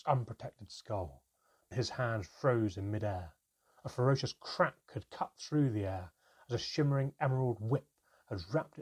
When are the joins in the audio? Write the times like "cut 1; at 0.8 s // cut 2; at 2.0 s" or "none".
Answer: cut 1; at 1.7 s